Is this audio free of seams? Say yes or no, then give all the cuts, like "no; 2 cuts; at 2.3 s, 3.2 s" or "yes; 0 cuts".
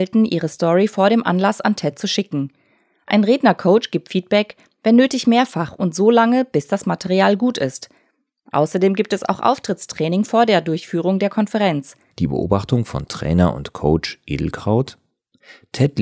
no; 1 cut; at 12.1 s